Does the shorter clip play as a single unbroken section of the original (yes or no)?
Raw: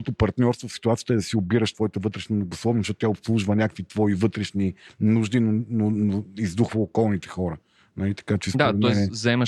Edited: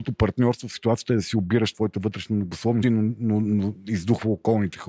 no